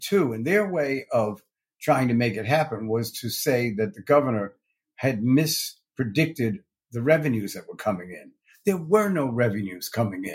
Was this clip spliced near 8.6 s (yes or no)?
no